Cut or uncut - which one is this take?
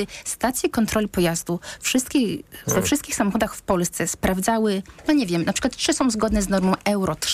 uncut